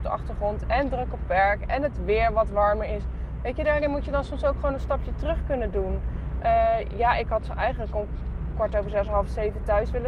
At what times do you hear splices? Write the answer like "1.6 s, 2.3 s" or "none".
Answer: none